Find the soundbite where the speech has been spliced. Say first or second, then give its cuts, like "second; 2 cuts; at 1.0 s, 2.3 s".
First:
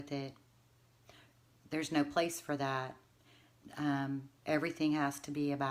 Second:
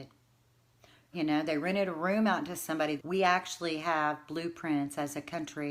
second; 2 cuts; at 1.1 s, 3.0 s